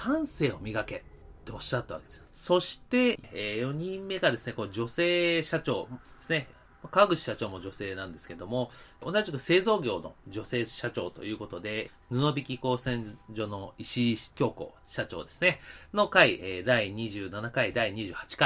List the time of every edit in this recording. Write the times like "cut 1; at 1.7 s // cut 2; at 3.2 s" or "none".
cut 1; at 2.3 s